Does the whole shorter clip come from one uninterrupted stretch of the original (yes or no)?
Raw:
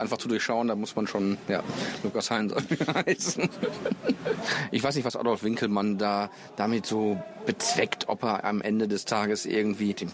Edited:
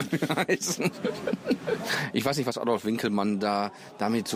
yes